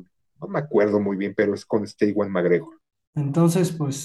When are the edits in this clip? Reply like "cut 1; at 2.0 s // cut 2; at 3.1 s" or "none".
cut 1; at 3.1 s

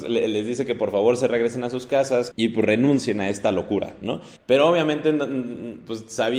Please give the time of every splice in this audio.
cut 1; at 2.3 s // cut 2; at 4.4 s

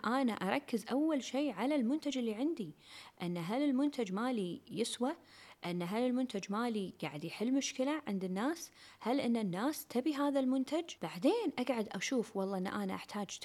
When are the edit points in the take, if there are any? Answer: cut 1; at 11.0 s

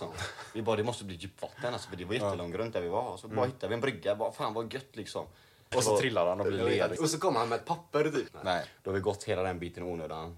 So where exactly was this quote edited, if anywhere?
cut 1; at 5.7 s // cut 2; at 7.0 s // cut 3; at 8.3 s

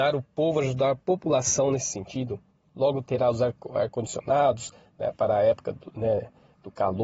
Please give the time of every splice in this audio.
none

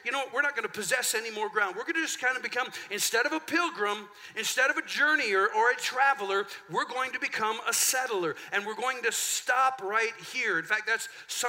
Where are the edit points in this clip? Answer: none

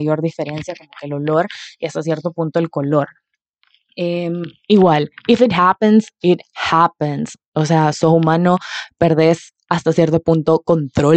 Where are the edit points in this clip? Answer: none

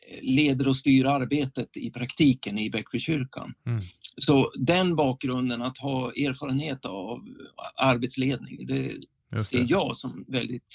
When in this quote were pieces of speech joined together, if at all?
none

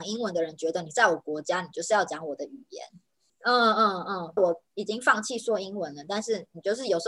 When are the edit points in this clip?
cut 1; at 3.3 s // cut 2; at 4.4 s

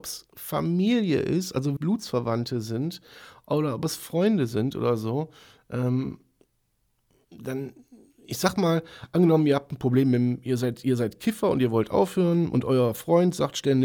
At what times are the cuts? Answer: cut 1; at 1.8 s

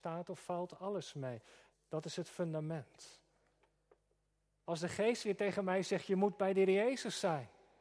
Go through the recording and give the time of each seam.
cut 1; at 1.7 s // cut 2; at 4.7 s

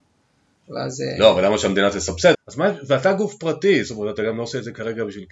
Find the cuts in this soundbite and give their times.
cut 1; at 2.3 s

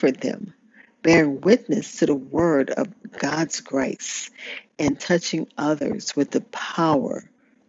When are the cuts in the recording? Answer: none

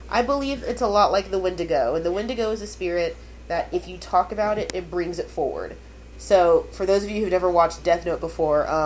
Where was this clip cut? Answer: cut 1; at 6.1 s

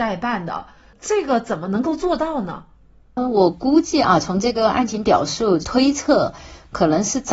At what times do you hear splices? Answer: none

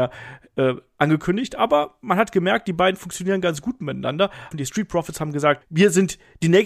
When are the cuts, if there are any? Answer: cut 1; at 4.5 s // cut 2; at 5.6 s

